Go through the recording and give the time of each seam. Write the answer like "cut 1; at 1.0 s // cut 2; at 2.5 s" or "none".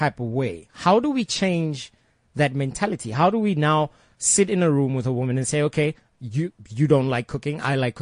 cut 1; at 4.2 s